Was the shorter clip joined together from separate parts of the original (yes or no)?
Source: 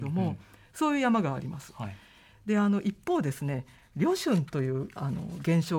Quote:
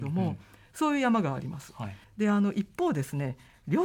yes